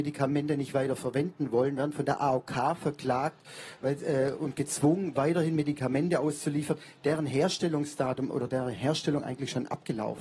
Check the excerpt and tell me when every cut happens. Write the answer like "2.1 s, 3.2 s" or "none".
none